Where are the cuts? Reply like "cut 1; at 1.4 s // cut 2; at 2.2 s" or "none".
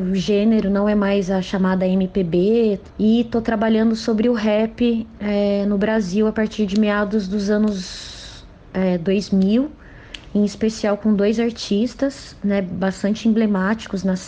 none

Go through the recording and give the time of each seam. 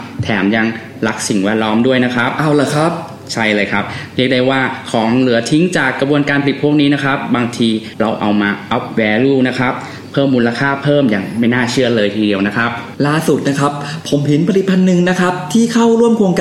none

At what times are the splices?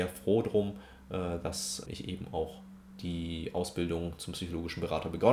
cut 1; at 1.9 s

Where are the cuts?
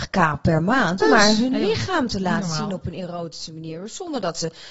cut 1; at 1.0 s

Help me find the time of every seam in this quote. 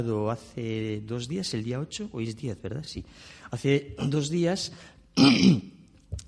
none

